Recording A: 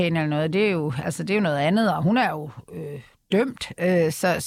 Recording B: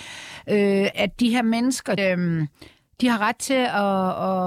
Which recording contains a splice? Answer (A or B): B